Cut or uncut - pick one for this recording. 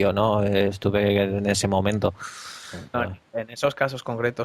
cut